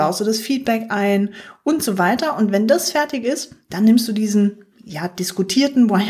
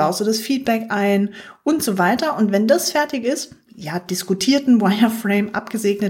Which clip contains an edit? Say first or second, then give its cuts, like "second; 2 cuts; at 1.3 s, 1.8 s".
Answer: second; 1 cut; at 3.7 s